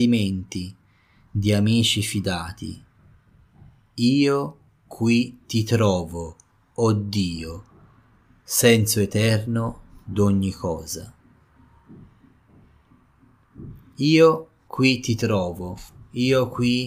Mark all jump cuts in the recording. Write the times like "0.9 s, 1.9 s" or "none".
none